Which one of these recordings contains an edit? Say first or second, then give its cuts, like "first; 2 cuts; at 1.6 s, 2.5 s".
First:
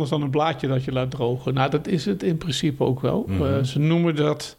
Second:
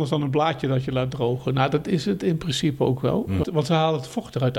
second; 1 cut; at 3.4 s